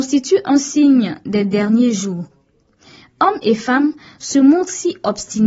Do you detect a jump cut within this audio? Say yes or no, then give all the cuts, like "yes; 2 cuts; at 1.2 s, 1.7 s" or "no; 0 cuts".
no; 0 cuts